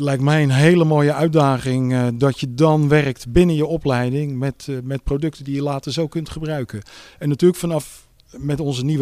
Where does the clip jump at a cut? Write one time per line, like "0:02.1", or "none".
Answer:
none

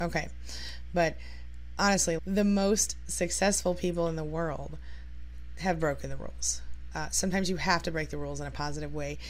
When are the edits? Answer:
0:02.2

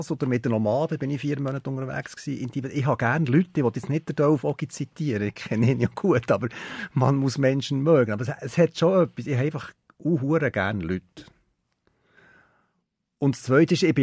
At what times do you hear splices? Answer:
none

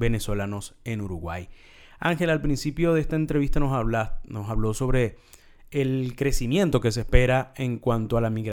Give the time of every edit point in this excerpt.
none

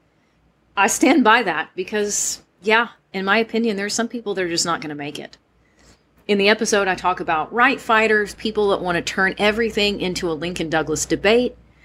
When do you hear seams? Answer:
none

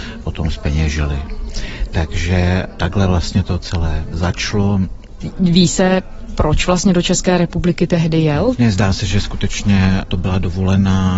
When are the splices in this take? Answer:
0:08.6

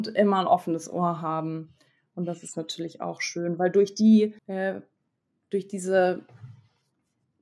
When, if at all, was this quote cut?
0:04.4

